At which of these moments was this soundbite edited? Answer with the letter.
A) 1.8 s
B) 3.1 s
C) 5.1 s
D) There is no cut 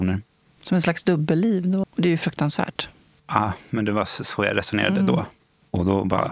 A